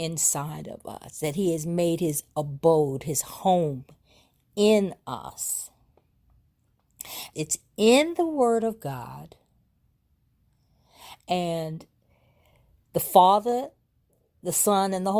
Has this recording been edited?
yes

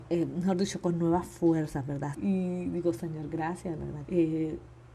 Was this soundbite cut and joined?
yes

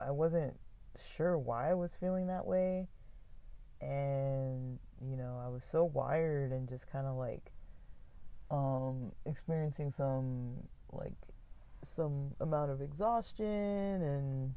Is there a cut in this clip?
no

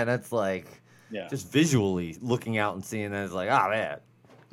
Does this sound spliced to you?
no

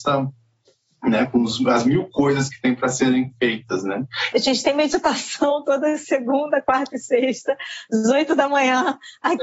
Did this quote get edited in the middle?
yes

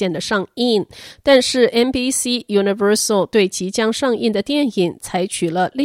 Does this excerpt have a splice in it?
no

